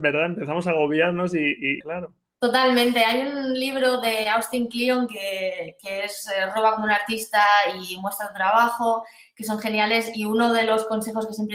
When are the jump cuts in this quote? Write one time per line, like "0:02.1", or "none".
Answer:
0:01.8